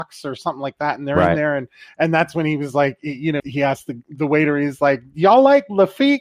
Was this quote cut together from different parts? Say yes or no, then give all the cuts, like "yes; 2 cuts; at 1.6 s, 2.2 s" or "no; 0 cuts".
yes; 1 cut; at 3.4 s